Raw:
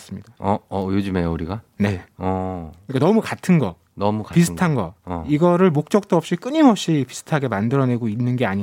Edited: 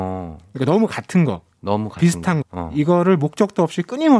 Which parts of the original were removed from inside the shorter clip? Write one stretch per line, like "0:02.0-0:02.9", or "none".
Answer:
0:04.7-0:04.9